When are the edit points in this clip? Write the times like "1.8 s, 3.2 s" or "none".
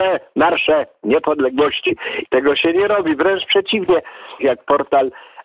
2.3 s, 4.4 s